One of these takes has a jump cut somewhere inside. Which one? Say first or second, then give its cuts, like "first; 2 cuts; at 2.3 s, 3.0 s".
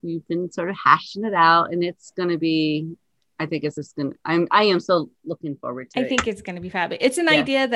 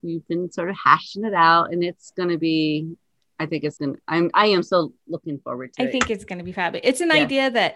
second; 1 cut; at 3.8 s